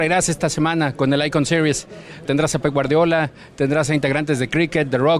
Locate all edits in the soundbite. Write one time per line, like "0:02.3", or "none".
0:02.3